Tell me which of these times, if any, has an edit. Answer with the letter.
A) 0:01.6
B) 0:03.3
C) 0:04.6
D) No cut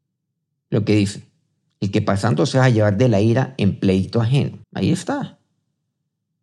C